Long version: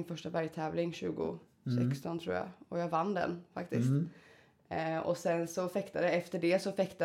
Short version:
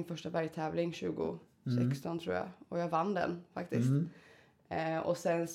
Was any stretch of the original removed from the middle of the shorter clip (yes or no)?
no